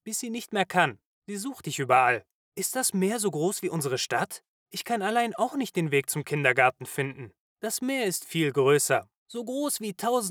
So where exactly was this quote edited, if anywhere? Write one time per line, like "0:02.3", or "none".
0:08.2

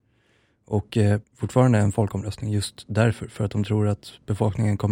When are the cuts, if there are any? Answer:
0:01.2

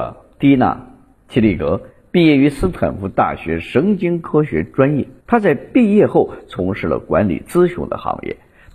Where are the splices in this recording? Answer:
0:05.2

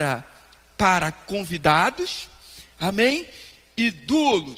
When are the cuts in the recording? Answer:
none

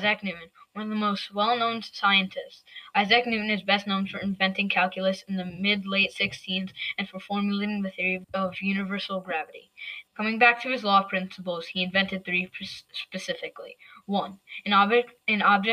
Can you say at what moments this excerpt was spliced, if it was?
0:08.2
0:10.1

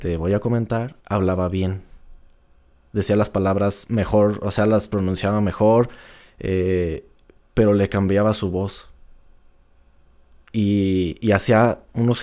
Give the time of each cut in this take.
0:01.0

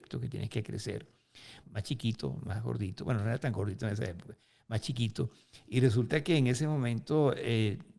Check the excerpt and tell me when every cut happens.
0:01.6

